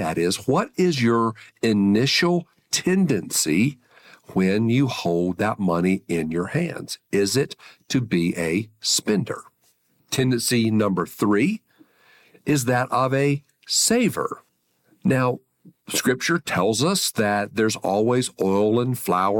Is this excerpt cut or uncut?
uncut